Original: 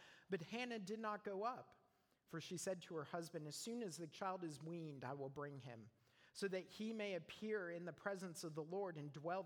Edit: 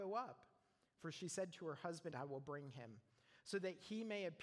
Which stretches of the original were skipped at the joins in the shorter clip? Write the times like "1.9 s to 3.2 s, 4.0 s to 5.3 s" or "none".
3.4 s to 5.0 s